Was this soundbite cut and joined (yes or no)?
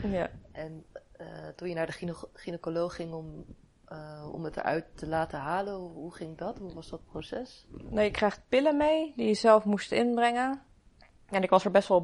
no